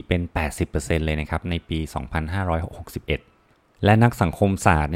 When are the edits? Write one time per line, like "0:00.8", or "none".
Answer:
none